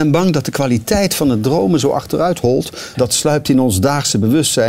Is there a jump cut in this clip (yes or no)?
yes